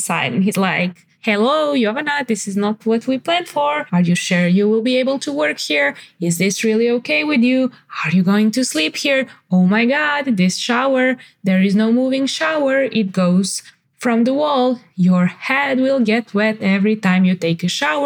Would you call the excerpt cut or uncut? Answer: uncut